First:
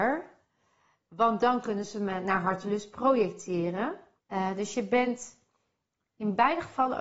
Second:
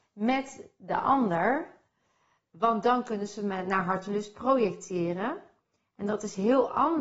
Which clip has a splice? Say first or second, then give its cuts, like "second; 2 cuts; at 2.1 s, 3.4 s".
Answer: first; 1 cut; at 4.2 s